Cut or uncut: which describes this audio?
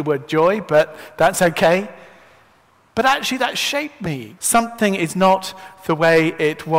cut